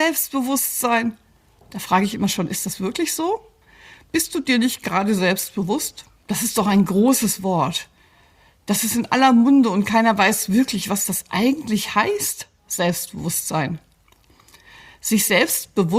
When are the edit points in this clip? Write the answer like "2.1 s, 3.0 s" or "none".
6.2 s